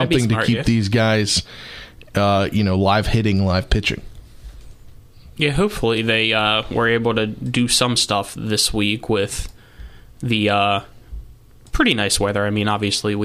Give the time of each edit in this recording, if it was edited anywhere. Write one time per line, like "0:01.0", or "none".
none